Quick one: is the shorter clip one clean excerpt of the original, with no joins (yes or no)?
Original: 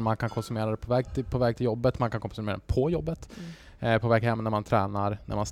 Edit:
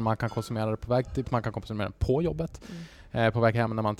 no